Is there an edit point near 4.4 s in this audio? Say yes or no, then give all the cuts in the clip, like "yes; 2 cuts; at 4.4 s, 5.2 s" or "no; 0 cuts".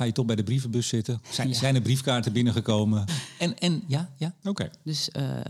yes; 2 cuts; at 3.1 s, 4.4 s